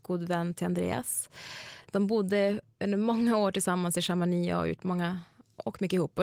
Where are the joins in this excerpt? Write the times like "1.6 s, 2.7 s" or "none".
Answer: none